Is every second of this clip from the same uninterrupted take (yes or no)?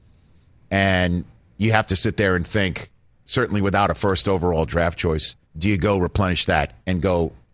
no